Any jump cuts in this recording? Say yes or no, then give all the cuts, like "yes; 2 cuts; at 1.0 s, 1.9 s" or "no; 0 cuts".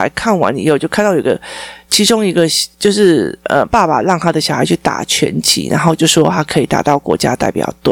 no; 0 cuts